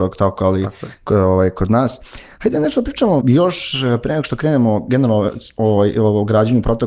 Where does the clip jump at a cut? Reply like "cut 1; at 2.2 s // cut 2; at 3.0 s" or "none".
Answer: cut 1; at 3.2 s

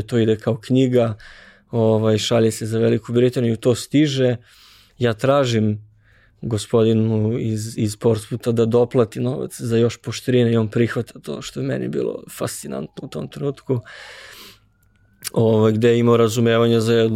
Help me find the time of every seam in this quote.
cut 1; at 4.9 s

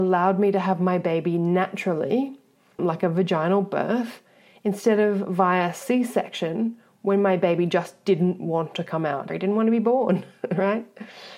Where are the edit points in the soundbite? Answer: cut 1; at 2.8 s // cut 2; at 9.3 s

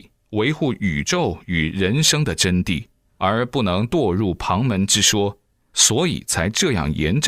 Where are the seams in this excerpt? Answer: none

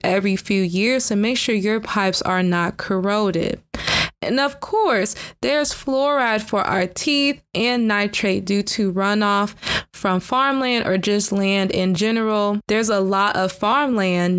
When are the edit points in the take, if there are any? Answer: none

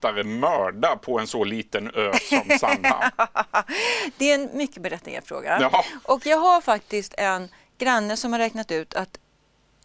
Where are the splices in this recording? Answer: none

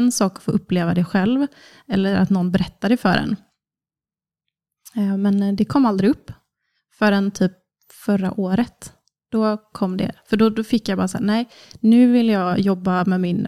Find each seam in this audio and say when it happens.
none

